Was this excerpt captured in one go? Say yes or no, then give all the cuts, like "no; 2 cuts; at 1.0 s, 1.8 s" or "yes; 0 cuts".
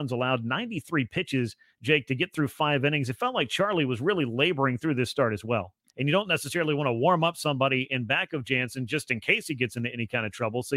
no; 1 cut; at 5.9 s